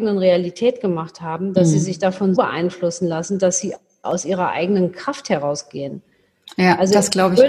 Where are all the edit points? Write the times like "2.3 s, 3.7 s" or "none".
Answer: 2.3 s